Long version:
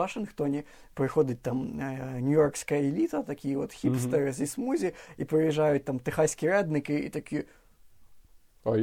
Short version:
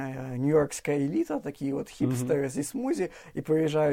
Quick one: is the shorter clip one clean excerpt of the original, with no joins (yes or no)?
yes